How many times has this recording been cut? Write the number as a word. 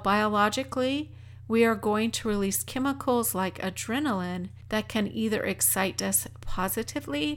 zero